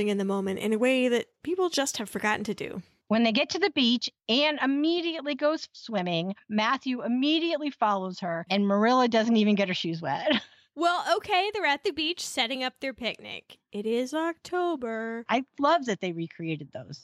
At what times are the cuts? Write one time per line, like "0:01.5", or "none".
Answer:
0:15.3